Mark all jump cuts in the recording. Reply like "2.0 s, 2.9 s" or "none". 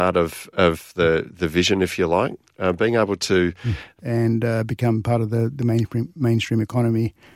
4.0 s